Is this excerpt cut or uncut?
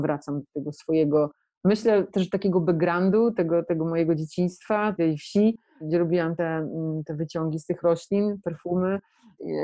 uncut